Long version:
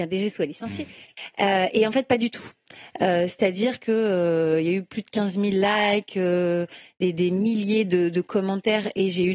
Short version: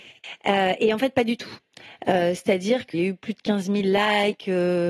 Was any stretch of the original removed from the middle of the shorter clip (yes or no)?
yes